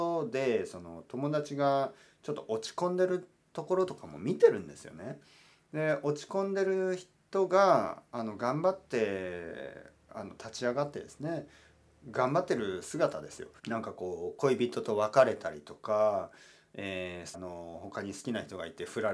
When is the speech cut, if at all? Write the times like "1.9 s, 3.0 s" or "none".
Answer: 13.6 s, 17.3 s